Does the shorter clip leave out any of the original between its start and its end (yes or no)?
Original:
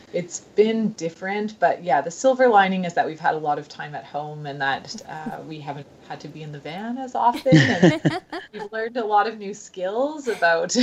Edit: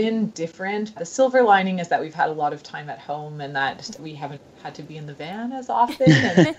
yes